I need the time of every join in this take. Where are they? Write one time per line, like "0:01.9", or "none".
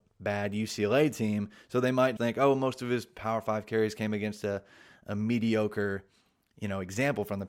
0:02.2